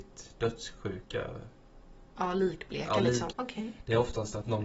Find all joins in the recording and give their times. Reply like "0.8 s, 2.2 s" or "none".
3.3 s